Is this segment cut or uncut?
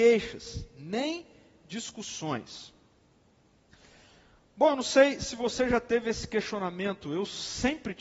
uncut